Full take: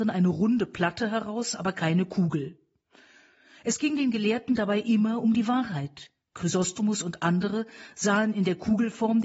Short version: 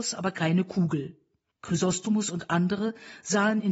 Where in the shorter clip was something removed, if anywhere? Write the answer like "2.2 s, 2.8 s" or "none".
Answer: 1.5 s